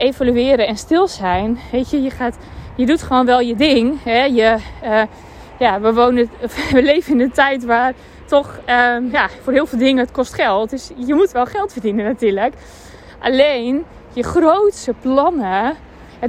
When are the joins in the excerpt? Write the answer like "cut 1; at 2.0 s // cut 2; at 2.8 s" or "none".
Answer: none

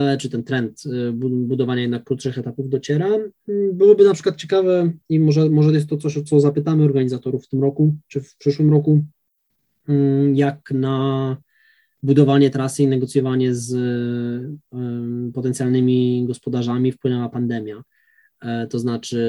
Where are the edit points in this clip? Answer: none

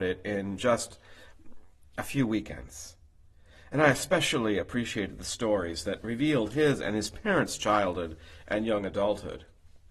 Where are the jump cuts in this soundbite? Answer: none

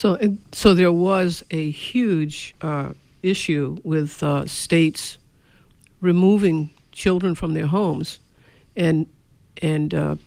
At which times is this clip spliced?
none

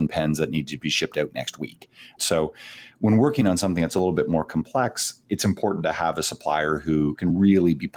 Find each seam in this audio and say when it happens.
cut 1; at 2.2 s

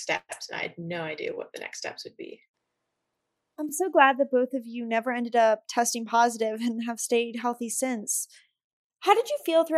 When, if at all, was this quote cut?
none

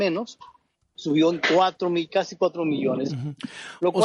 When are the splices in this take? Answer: cut 1; at 0.9 s // cut 2; at 3.1 s

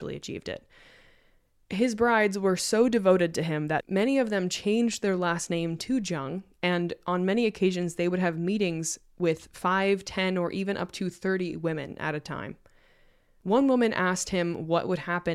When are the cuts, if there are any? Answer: none

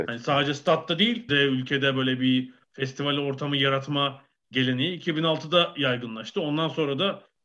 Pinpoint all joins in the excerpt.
cut 1; at 1.3 s

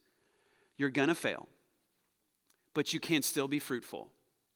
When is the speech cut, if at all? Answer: none

